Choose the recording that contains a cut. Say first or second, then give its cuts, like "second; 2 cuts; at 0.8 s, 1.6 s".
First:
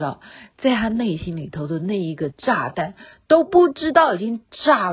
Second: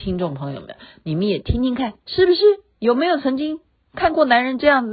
second; 1 cut; at 2.0 s